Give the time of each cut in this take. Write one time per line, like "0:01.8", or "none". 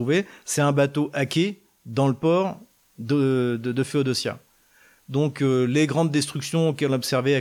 none